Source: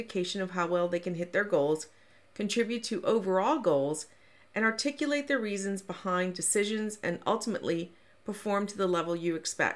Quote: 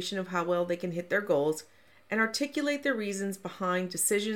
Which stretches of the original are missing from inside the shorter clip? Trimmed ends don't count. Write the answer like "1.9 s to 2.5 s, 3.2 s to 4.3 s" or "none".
2.1 s to 4.4 s

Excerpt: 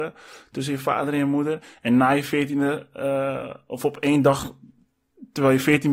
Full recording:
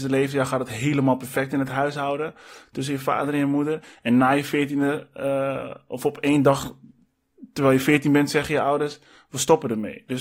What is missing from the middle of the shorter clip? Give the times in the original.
none

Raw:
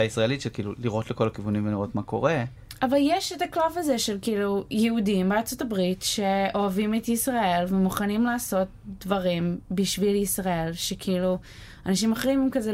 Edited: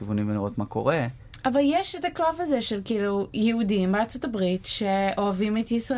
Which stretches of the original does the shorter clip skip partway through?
none

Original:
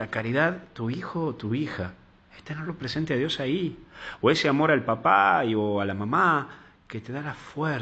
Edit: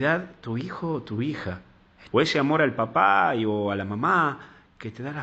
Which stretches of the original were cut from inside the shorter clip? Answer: 2.4 s to 4.2 s

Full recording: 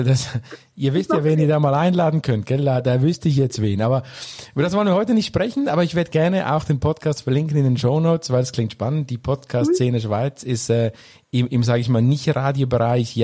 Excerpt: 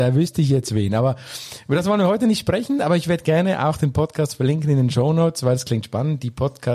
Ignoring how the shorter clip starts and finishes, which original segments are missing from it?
none

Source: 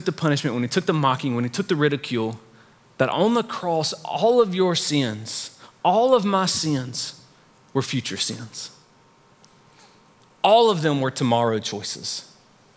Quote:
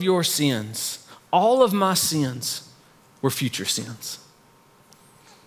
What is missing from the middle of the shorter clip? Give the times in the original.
none

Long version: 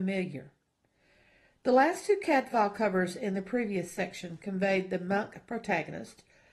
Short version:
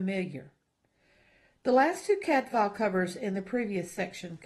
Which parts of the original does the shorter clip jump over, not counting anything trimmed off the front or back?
none

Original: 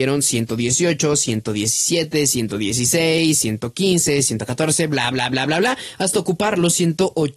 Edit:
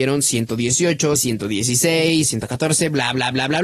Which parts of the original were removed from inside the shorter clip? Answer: 1.1 s to 2.2 s, 3.3 s to 4.2 s

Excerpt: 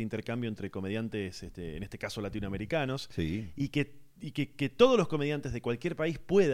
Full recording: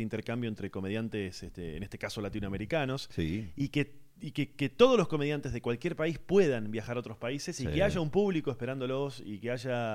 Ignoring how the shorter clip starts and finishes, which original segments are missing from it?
none

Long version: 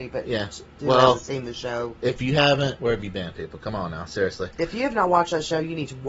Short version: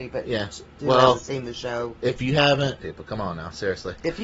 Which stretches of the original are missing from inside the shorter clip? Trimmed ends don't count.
2.8 s to 3.3 s

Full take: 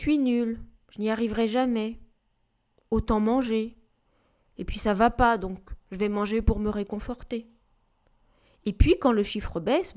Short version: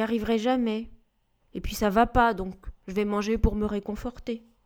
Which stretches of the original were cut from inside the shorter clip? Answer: 2.5 s to 4.4 s

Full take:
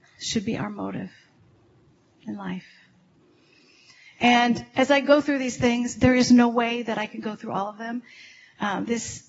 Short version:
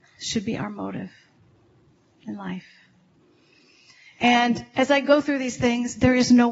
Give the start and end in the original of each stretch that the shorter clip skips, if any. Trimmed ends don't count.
none

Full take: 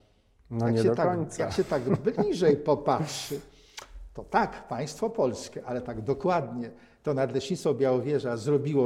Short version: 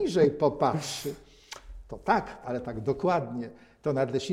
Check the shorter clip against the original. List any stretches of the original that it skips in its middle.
4.7 s to 5.6 s

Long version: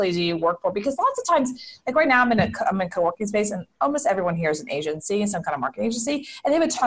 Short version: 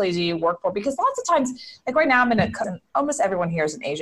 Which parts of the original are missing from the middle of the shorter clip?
2.6 s to 3.5 s

